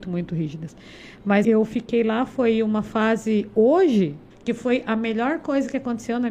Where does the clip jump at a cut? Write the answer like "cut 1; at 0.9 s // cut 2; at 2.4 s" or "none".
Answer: cut 1; at 1.4 s // cut 2; at 4.3 s